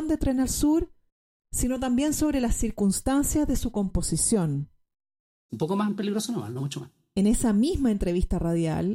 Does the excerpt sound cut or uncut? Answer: cut